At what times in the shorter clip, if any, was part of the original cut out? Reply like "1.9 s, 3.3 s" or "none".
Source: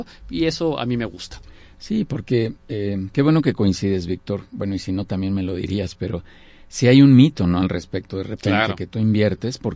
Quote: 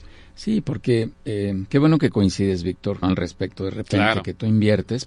3.0 s